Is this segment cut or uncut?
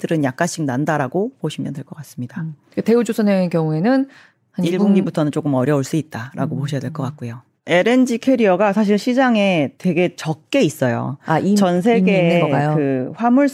uncut